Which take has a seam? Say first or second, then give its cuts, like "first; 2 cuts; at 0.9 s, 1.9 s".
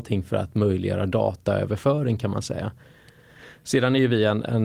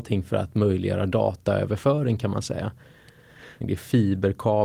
second; 1 cut; at 3.6 s